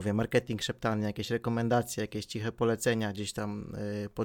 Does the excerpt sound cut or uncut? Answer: uncut